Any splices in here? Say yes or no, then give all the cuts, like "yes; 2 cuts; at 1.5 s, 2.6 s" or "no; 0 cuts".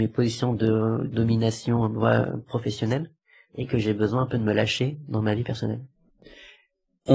no; 0 cuts